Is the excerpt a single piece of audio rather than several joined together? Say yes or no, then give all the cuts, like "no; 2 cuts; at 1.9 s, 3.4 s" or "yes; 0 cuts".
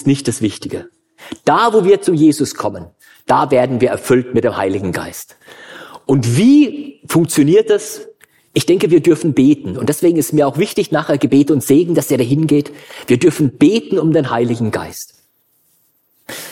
yes; 0 cuts